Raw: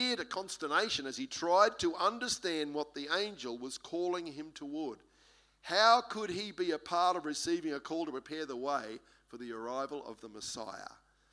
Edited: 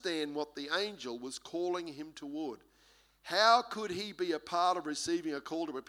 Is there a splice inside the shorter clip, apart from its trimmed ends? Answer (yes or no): no